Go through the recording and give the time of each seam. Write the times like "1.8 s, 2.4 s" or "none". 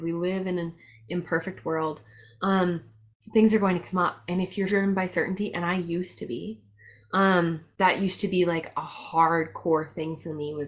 4.7 s